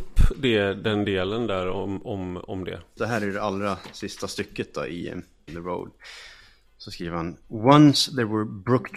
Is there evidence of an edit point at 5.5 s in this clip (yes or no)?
yes